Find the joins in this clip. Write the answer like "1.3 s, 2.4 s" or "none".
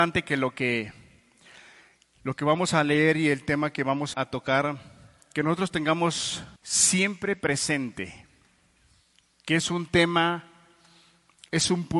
4.1 s, 6.6 s